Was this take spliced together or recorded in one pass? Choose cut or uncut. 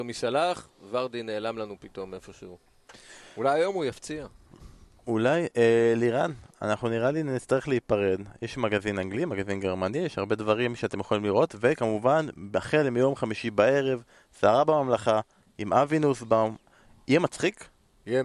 uncut